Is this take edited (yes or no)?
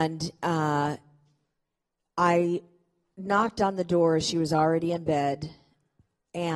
no